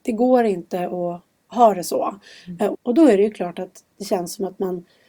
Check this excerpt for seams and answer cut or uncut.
cut